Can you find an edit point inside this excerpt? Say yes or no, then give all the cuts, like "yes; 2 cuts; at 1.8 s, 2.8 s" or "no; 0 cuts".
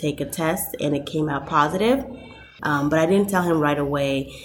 yes; 1 cut; at 2.6 s